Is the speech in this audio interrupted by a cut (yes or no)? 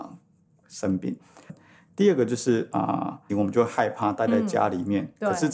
yes